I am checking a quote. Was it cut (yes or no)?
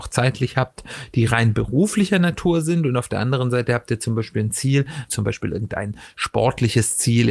yes